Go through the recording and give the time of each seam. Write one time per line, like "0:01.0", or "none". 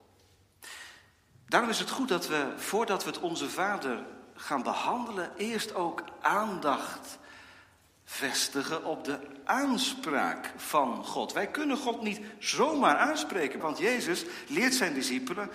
0:13.6